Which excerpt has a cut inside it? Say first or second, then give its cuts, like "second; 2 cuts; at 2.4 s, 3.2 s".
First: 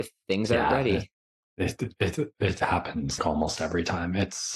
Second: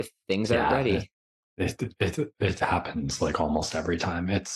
first; 1 cut; at 3.2 s